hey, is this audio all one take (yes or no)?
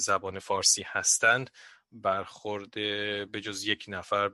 yes